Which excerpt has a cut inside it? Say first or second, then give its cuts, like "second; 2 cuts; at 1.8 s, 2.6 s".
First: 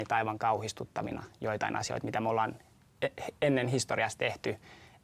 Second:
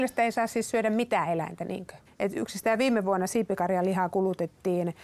second; 1 cut; at 2.1 s